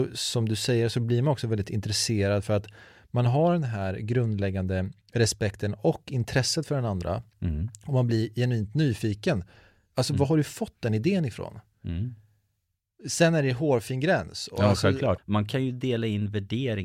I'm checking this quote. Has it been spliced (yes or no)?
yes